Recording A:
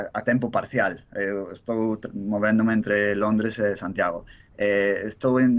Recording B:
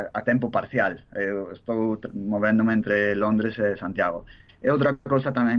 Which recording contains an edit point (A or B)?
B